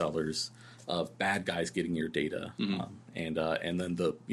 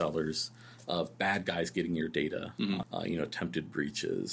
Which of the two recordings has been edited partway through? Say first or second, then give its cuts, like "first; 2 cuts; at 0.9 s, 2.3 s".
second; 1 cut; at 2.8 s